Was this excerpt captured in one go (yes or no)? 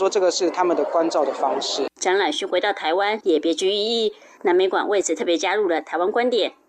no